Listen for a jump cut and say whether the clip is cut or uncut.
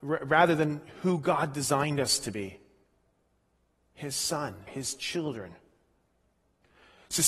cut